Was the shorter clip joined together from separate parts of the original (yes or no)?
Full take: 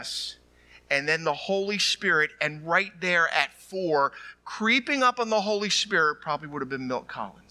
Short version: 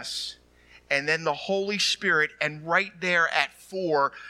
no